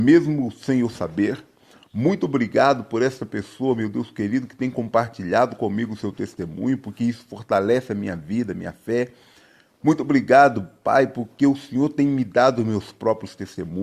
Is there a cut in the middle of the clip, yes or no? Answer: no